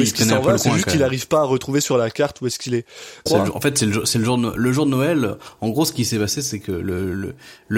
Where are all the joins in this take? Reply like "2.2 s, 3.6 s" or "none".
3.3 s